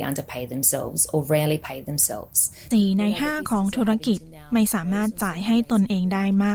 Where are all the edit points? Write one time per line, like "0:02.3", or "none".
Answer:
0:02.7